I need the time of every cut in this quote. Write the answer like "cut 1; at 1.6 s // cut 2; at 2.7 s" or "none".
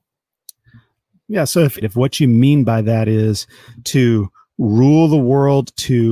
cut 1; at 1.8 s